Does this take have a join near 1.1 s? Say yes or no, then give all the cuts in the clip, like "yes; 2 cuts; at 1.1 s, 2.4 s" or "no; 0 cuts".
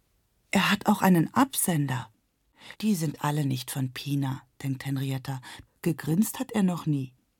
no; 2 cuts; at 2.7 s, 5.7 s